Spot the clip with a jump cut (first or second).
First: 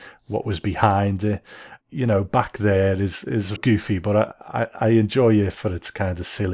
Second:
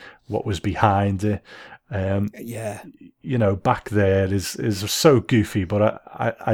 first